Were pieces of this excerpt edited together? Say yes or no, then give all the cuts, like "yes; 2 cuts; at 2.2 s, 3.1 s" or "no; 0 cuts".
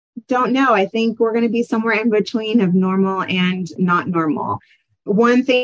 yes; 1 cut; at 3.8 s